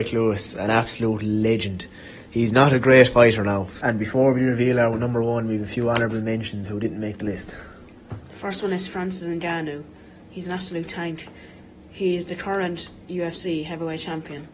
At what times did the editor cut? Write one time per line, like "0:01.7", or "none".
0:03.8